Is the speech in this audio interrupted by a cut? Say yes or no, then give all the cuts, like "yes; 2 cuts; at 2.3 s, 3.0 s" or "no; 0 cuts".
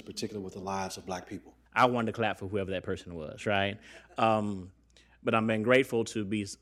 yes; 1 cut; at 1.7 s